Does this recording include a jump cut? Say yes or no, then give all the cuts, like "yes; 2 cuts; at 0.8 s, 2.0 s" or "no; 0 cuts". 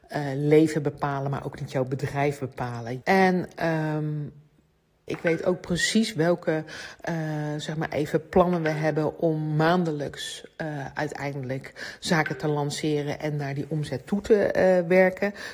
yes; 2 cuts; at 3.0 s, 5.1 s